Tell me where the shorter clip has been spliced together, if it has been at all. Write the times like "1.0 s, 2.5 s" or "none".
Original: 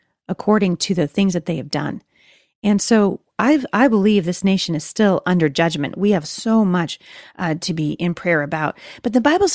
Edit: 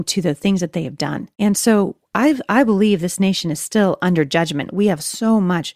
1.3 s